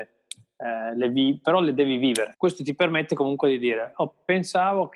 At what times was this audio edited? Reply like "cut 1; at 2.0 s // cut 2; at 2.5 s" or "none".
cut 1; at 2.3 s